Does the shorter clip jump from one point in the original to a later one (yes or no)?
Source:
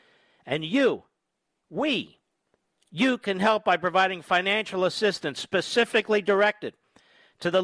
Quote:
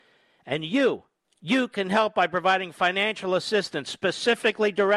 yes